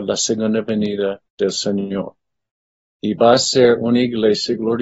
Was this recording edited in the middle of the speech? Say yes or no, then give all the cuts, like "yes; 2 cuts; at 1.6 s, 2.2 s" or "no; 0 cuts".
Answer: yes; 1 cut; at 1.3 s